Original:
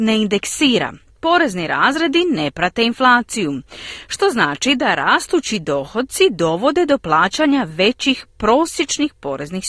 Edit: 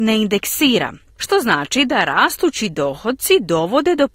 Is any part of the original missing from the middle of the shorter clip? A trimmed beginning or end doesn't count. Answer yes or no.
yes